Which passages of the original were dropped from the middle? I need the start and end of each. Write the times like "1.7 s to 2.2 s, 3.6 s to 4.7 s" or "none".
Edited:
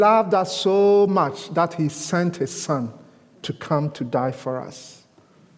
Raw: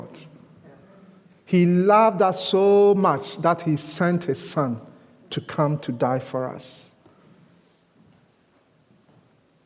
none